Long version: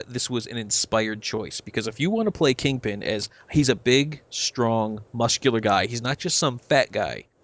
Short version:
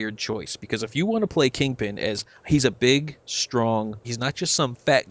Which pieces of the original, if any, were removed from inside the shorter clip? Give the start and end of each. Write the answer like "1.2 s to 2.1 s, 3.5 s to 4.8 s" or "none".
5.1 s to 5.9 s